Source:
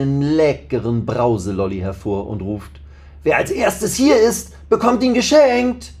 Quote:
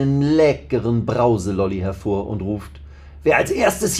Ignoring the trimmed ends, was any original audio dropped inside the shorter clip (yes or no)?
no